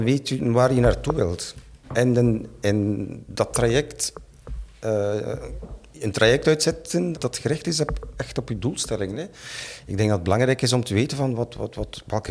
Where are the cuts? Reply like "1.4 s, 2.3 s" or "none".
7.1 s